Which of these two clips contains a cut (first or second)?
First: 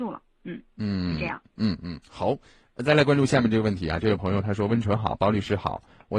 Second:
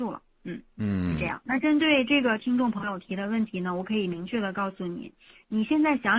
second